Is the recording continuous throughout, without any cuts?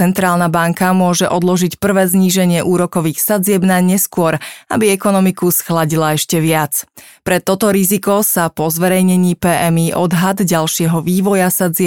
yes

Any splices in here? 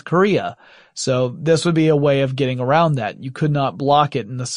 no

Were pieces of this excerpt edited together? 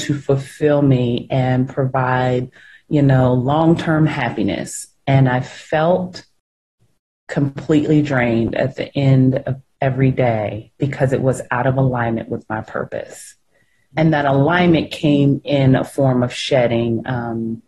yes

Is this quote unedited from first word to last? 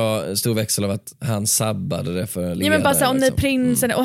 yes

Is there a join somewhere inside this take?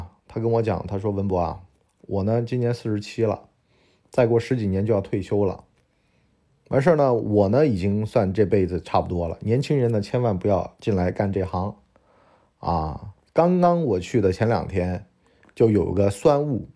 no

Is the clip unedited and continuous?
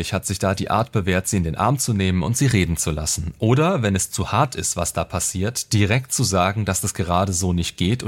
yes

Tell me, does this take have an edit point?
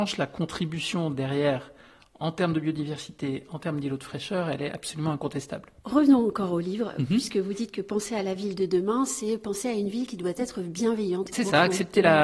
yes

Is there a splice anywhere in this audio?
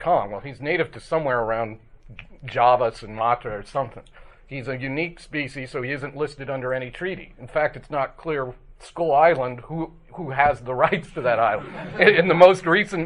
no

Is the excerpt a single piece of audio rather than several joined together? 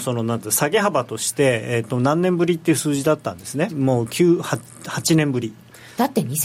no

